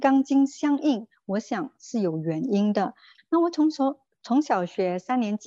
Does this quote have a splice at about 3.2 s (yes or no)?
yes